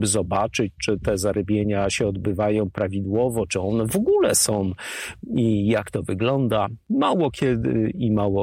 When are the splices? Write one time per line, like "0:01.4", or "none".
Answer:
0:03.5

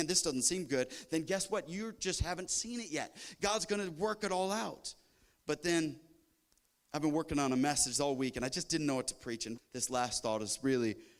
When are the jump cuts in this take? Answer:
0:09.6

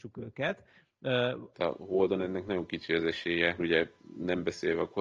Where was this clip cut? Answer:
0:01.5
0:03.6

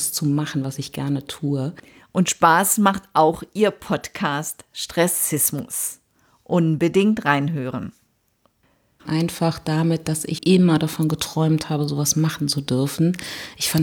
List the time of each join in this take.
0:09.0
0:10.4

